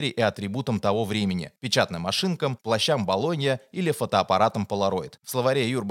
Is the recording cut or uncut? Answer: uncut